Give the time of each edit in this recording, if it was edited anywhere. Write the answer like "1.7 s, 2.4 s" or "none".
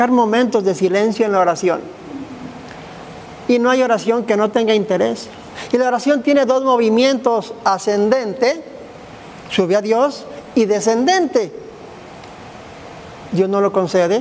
none